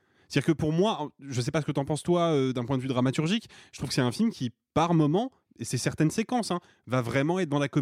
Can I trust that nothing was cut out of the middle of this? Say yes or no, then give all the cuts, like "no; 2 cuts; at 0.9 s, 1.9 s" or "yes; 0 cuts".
yes; 0 cuts